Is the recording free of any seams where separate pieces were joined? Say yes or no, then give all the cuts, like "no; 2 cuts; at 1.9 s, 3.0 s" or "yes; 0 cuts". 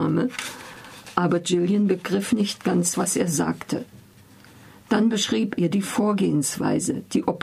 no; 1 cut; at 5.6 s